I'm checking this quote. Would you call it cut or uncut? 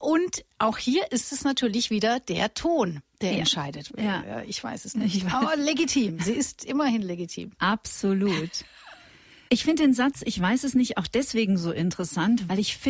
cut